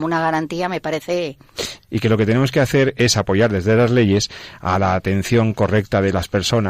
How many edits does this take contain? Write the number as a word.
one